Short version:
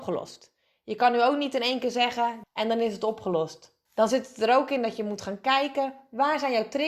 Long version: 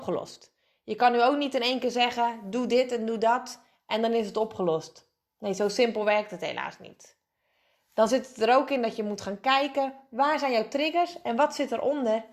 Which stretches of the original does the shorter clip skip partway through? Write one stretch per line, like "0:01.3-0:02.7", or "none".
0:02.4-0:03.8
0:05.2-0:07.8